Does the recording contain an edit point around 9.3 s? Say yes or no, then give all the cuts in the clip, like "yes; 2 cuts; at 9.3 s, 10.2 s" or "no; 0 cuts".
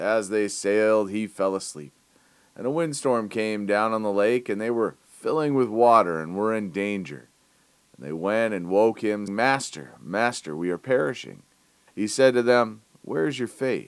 yes; 2 cuts; at 9.3 s, 11.9 s